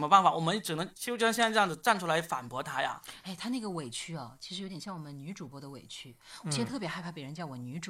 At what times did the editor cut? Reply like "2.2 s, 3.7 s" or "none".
none